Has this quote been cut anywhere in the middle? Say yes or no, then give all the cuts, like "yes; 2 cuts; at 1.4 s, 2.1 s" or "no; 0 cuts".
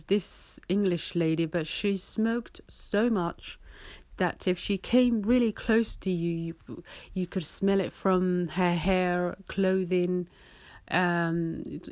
no; 0 cuts